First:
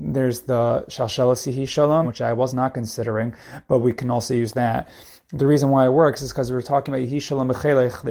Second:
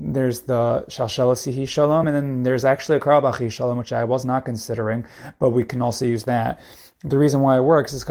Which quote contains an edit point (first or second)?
first